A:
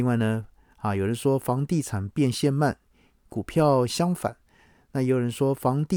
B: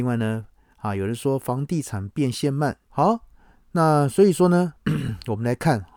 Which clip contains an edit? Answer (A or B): B